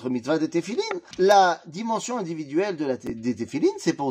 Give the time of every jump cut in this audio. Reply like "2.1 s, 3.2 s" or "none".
1.1 s